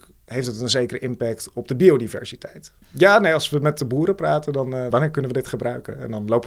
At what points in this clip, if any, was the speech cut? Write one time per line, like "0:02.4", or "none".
0:02.8
0:04.9